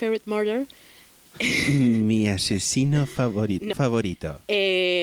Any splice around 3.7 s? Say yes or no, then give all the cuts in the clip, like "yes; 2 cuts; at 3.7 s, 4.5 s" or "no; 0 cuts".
yes; 1 cut; at 3.7 s